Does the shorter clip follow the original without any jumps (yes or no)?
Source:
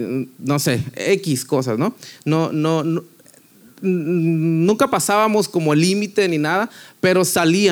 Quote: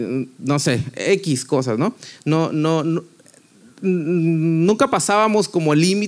yes